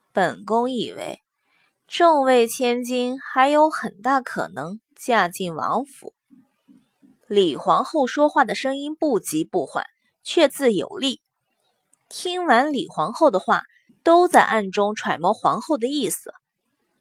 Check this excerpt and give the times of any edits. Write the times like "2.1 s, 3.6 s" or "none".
10.5 s, 13.9 s